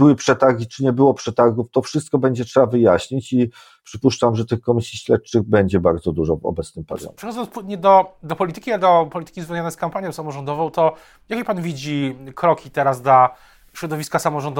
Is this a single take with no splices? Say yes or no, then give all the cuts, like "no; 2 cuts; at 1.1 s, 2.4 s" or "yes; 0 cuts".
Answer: yes; 0 cuts